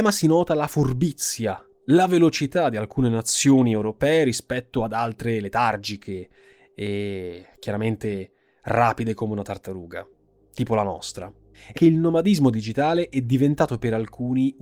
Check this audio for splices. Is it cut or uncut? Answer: cut